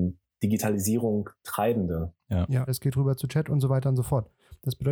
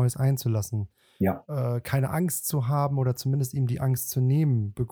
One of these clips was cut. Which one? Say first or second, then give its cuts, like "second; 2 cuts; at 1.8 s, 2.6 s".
first; 1 cut; at 2.7 s